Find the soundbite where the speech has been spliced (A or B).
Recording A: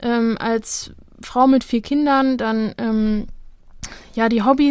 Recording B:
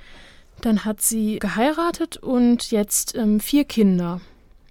B